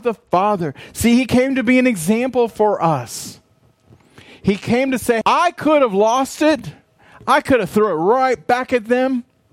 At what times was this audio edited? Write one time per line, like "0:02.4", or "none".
0:05.2